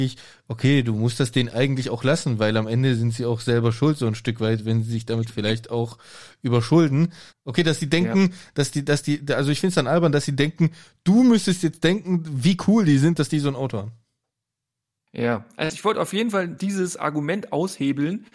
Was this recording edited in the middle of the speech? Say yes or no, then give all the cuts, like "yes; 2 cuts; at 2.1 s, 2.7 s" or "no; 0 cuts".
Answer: yes; 1 cut; at 7.3 s